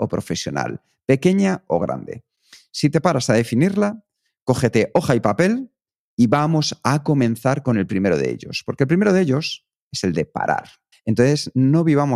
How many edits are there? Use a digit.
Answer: 1